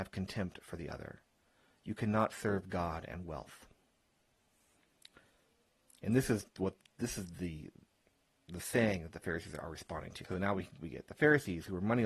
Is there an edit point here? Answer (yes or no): yes